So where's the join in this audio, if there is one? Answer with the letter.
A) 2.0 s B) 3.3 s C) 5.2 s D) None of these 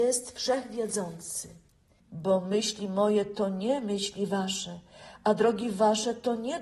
A